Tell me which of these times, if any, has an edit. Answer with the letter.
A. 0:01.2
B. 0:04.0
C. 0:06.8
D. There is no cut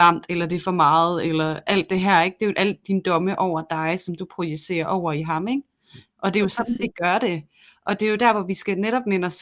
D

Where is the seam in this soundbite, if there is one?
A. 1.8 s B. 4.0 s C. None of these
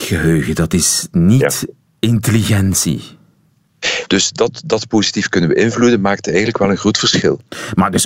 B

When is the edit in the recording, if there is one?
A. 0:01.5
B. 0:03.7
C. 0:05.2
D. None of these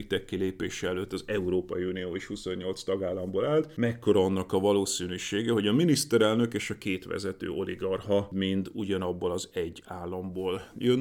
D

